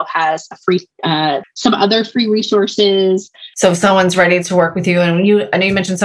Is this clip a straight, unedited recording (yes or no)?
no